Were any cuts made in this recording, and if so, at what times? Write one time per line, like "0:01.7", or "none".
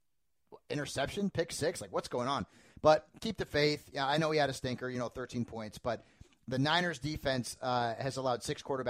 none